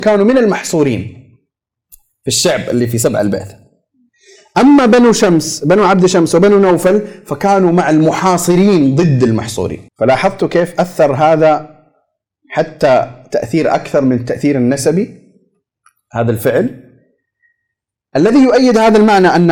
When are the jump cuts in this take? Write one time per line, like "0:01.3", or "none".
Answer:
0:09.9

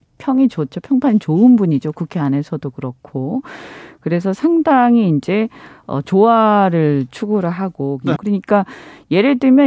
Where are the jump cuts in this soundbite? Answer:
0:08.2

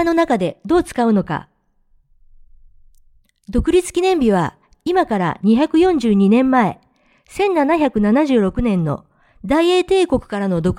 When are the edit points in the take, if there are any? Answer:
none

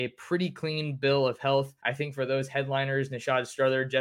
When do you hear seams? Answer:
0:01.8

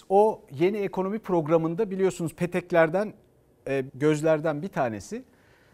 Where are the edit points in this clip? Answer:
0:03.9

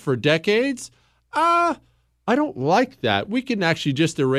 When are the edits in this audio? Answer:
0:03.2

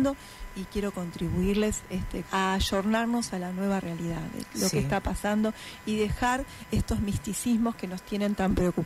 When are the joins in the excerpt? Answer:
0:02.2

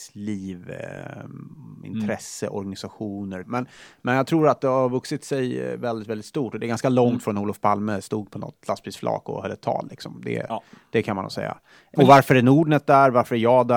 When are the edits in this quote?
0:03.4
0:12.0

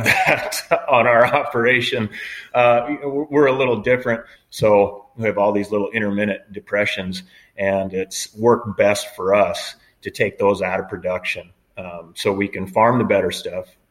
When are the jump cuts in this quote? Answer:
0:04.3

